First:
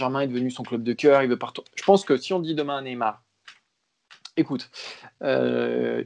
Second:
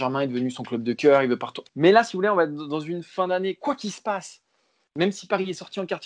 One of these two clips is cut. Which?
second; 1 cut; at 1.7 s

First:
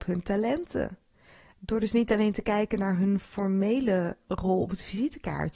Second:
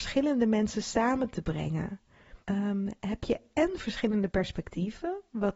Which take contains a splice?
second; 1 cut; at 2.4 s

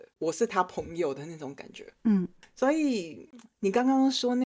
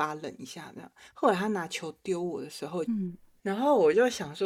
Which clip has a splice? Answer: second; 1 cut; at 2.8 s

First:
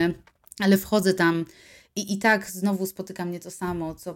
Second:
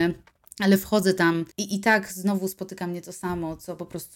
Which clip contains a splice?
second; 1 cut; at 1.5 s

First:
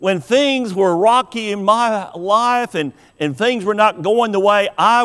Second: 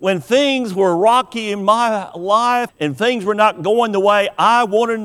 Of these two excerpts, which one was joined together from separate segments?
second; 1 cut; at 2.7 s

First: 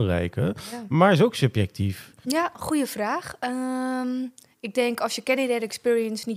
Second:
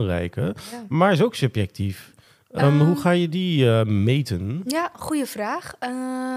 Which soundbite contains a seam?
first; 1 cut; at 2.2 s

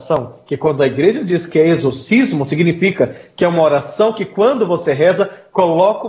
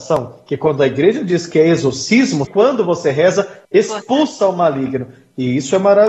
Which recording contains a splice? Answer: second; 2 cuts; at 2.4 s, 3.6 s

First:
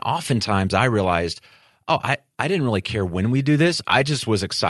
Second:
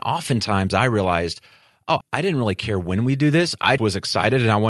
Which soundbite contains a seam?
second; 2 cuts; at 2.0 s, 3.8 s

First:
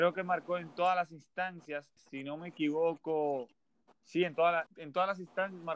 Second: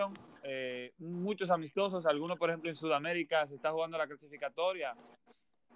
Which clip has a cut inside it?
first; 2 cuts; at 2.0 s, 4.7 s

